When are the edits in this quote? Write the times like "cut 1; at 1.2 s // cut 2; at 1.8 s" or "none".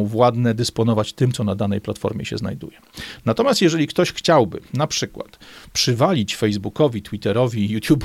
none